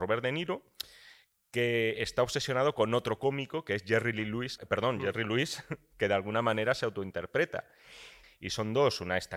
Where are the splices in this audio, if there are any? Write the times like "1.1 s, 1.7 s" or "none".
4.6 s, 8.2 s